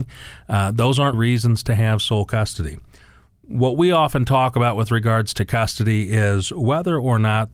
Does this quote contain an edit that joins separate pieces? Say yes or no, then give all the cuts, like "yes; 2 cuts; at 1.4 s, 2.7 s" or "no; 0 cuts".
yes; 1 cut; at 1.1 s